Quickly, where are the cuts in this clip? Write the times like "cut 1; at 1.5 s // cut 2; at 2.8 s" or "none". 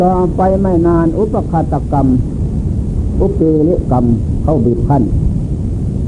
cut 1; at 3.8 s